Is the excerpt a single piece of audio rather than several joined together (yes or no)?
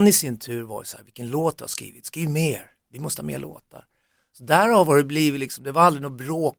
yes